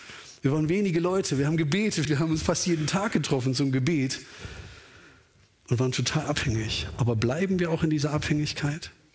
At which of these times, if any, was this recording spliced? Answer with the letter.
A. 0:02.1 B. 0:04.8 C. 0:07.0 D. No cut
A